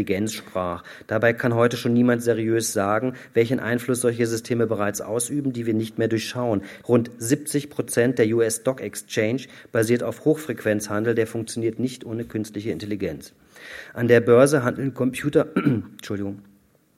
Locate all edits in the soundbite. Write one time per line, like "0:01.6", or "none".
0:06.8